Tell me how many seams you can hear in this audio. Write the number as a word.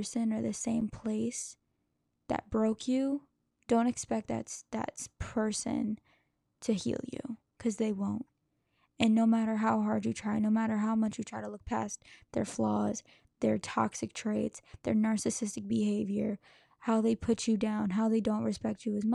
zero